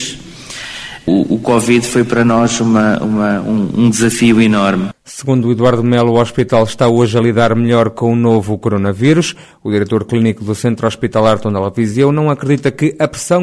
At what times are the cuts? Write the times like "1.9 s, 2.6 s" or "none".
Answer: none

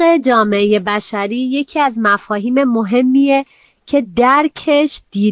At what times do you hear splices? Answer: none

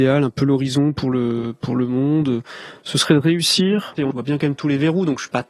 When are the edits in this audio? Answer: 4.0 s

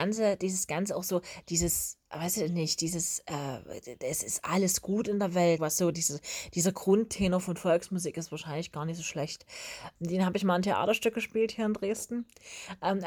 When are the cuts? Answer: 5.6 s, 10.0 s

